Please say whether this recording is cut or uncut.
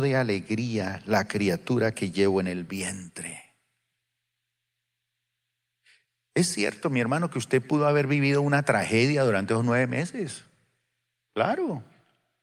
uncut